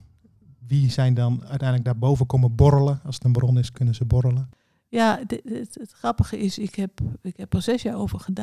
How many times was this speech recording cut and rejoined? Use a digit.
0